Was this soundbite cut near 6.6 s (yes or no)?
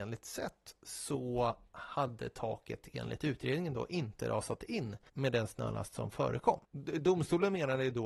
yes